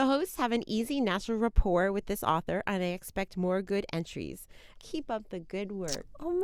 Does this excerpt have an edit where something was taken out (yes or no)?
yes